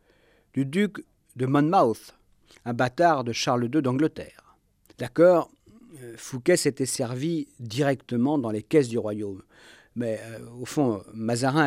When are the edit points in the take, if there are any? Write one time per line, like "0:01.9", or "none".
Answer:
0:04.9

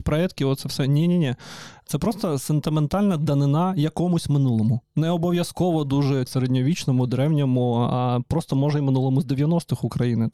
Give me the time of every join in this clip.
0:06.3

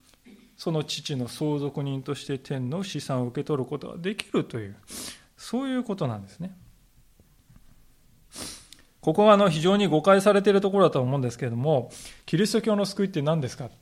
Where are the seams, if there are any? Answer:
none

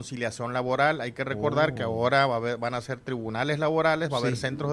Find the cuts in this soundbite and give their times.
none

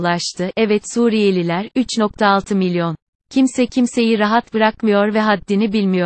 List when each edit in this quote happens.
0:03.2

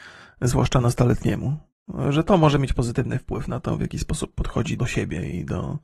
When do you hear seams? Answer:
0:04.8

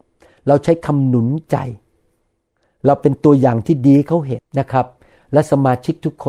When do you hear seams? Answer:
0:04.4

